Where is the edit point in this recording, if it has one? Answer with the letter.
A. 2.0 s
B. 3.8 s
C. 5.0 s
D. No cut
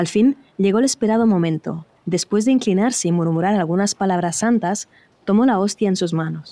A